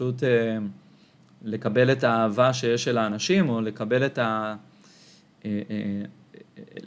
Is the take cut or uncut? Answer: uncut